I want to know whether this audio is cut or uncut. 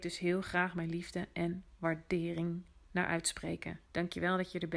cut